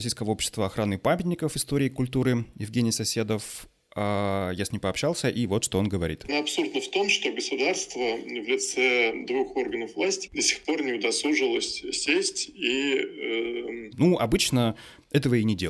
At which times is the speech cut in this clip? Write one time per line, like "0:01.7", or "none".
0:06.3
0:10.3
0:13.9